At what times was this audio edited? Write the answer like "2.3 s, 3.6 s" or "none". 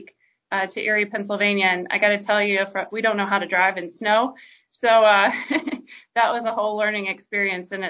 2.9 s